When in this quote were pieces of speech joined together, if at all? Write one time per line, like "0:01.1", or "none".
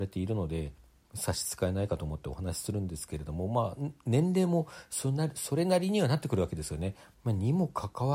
0:07.1